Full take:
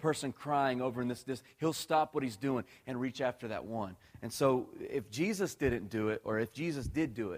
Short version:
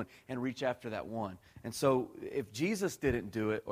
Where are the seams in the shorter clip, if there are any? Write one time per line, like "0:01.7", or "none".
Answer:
none